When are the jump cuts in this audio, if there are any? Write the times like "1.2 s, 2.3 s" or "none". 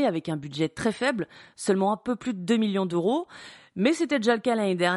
none